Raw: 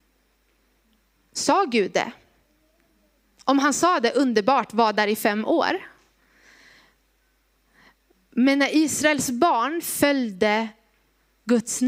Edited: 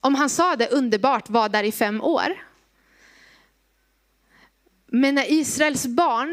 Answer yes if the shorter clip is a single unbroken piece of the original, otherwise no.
yes